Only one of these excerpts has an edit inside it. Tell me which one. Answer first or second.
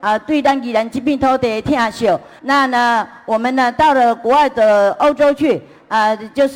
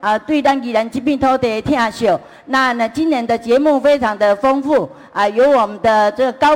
first